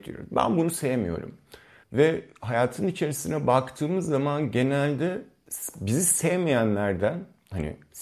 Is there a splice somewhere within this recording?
yes; 1 cut; at 1.8 s

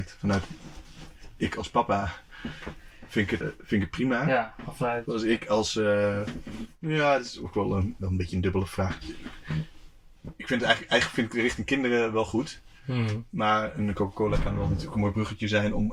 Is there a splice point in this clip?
yes; 2 cuts; at 3.4 s, 8.0 s

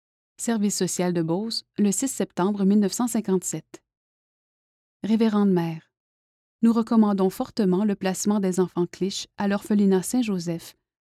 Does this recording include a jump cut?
yes; 1 cut; at 6.5 s

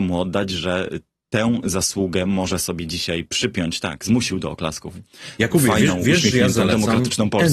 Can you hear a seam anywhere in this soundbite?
no; 0 cuts

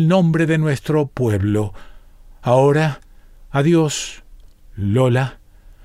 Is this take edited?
no; 0 cuts

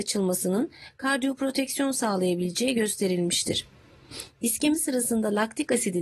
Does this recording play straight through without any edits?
yes; 0 cuts

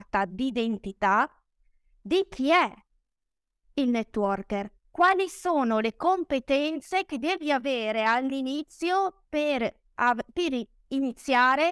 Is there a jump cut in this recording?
yes; 1 cut; at 4.8 s

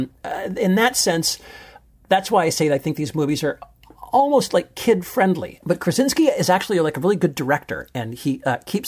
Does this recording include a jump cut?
yes; 1 cut; at 5.6 s

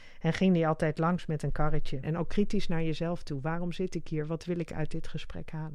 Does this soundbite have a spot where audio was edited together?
yes; 1 cut; at 2.0 s

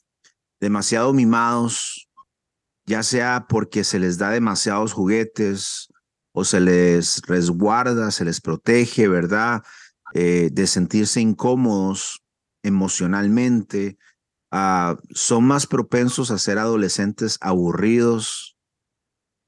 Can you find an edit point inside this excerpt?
no; 0 cuts

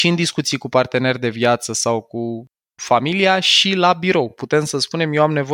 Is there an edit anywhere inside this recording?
no; 0 cuts

